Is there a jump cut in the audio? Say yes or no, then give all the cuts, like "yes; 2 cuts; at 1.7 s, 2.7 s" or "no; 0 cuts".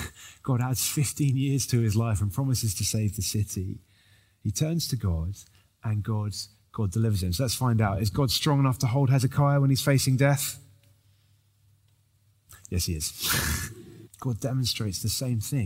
yes; 1 cut; at 14.1 s